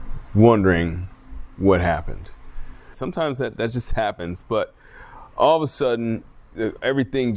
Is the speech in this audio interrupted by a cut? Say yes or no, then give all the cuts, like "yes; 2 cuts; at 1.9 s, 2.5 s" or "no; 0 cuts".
yes; 1 cut; at 2.9 s